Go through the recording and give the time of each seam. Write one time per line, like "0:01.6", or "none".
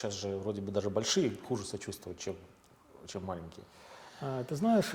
none